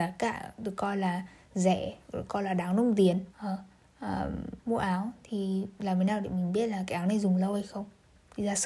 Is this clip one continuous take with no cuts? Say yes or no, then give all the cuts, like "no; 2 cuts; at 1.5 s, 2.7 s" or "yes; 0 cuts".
no; 2 cuts; at 3.3 s, 4.6 s